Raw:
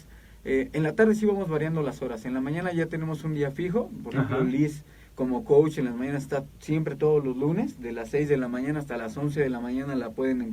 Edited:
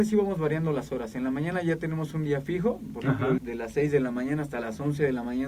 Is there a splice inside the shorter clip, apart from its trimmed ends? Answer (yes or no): yes